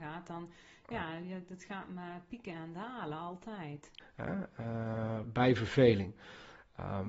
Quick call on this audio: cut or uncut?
cut